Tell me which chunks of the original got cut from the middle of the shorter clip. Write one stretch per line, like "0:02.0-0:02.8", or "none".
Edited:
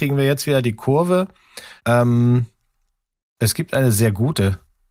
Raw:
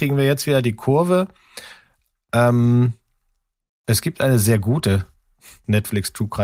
0:01.8-0:02.2